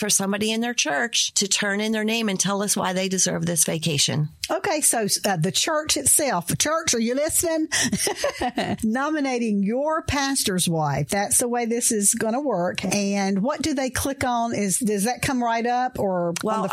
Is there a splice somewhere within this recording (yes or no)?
yes